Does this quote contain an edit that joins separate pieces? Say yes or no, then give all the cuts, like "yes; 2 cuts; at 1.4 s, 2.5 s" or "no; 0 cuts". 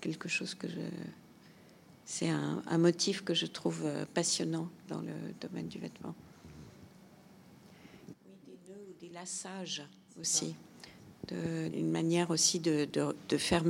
yes; 2 cuts; at 8.1 s, 11.7 s